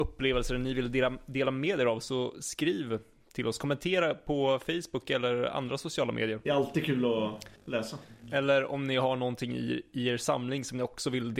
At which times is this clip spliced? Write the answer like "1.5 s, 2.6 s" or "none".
none